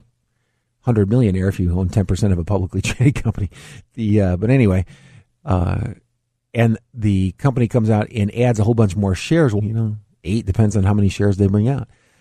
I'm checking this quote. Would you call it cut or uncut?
cut